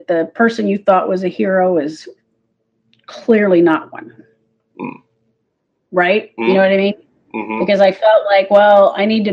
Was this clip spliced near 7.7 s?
no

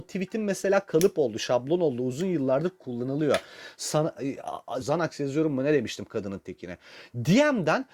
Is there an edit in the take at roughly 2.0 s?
no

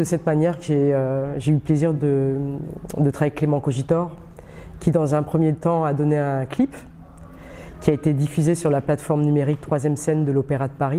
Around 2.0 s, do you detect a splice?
no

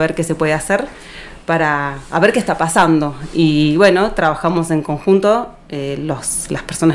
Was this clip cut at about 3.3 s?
no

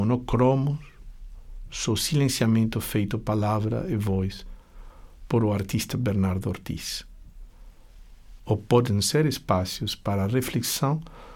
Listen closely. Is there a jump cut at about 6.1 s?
no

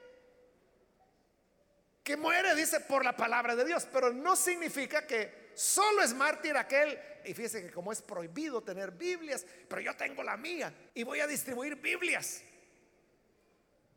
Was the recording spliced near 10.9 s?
yes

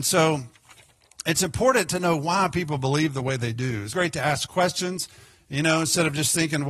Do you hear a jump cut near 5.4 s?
no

